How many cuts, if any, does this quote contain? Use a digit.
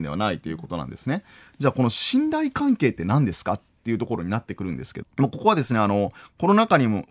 1